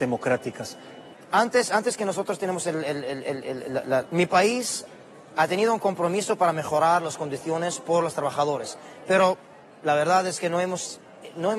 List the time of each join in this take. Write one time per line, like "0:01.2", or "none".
0:01.1
0:04.0